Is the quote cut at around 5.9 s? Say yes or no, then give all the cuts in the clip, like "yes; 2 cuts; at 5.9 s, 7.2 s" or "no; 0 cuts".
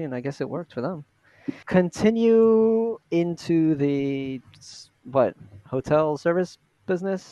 no; 2 cuts; at 1.6 s, 3.0 s